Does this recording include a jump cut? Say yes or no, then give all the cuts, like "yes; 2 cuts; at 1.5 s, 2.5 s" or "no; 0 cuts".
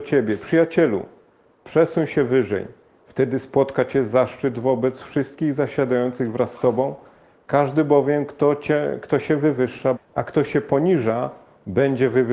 yes; 1 cut; at 9.9 s